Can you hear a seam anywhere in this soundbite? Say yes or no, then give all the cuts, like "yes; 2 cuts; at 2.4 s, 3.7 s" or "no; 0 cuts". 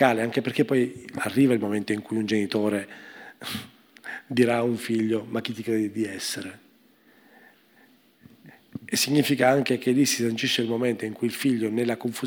no; 0 cuts